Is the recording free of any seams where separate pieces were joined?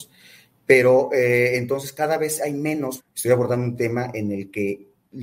no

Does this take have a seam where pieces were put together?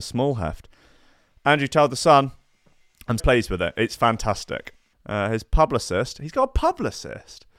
yes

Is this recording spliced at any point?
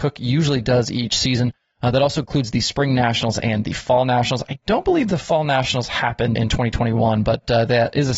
yes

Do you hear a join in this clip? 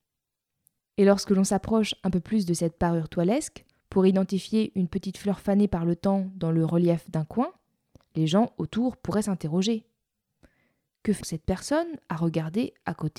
yes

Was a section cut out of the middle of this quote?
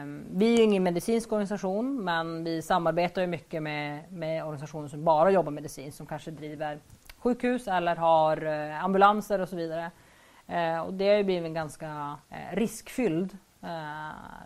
yes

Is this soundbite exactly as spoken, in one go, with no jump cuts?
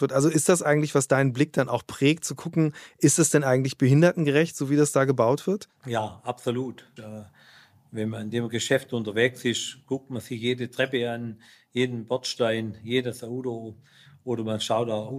no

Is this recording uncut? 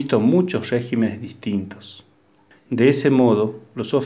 no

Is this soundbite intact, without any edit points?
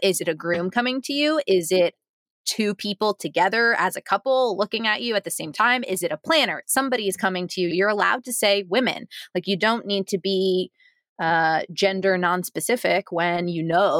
no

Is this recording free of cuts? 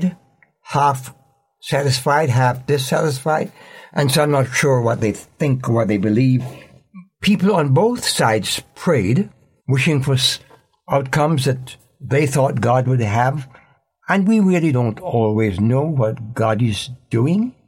no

